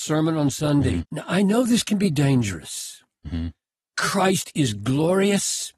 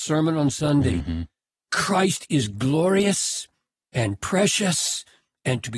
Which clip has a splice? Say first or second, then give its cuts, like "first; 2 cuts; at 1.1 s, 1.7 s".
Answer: first; 2 cuts; at 1.0 s, 3.2 s